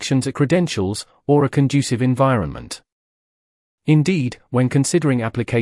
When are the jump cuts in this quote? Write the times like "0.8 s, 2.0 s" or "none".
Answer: 3.6 s